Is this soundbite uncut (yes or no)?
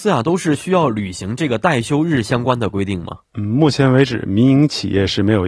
yes